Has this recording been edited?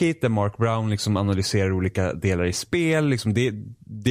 no; 0 cuts

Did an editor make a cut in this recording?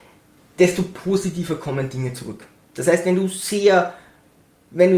no; 0 cuts

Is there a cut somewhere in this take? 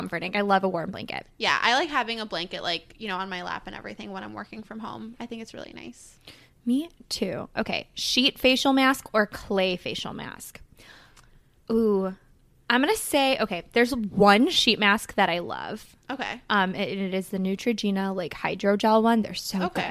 no; 0 cuts

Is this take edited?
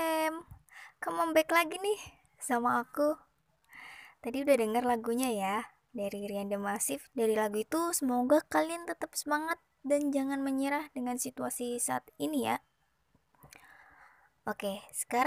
yes; 1 cut; at 7.1 s

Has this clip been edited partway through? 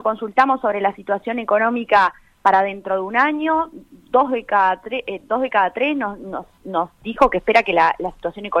no; 0 cuts

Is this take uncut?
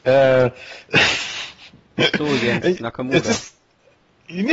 yes; 0 cuts

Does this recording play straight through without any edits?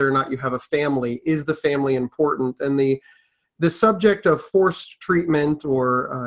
yes; 0 cuts

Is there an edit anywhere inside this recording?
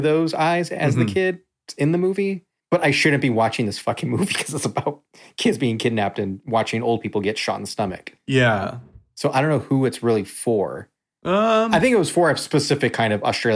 no; 0 cuts

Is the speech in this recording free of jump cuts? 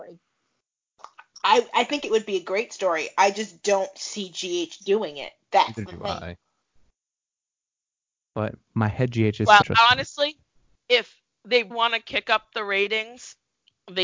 no; 2 cuts; at 9.6 s, 11.7 s

